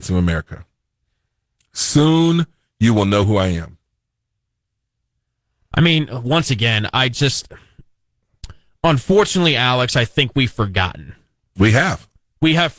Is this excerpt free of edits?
yes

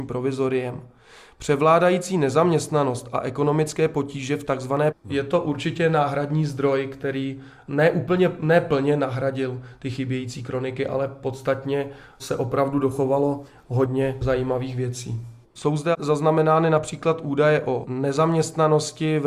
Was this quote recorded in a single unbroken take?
no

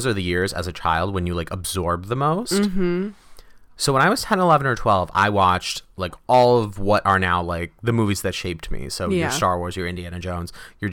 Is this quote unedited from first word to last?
yes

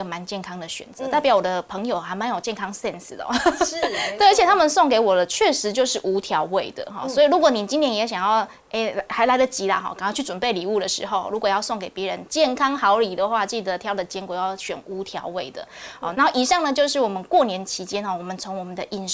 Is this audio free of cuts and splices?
no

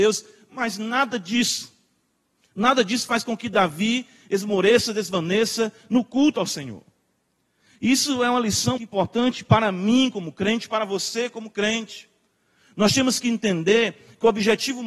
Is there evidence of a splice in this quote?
yes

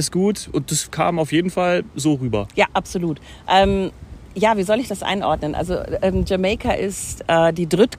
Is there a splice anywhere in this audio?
no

